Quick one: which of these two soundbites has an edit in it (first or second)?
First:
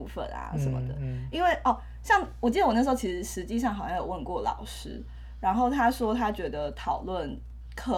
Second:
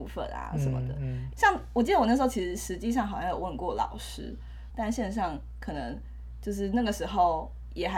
second